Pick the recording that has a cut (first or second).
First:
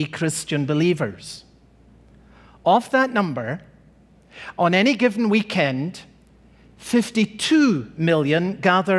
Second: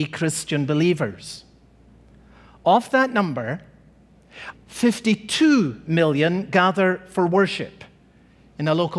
second